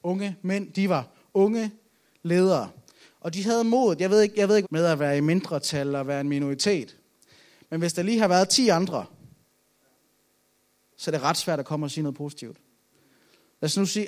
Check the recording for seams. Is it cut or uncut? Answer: cut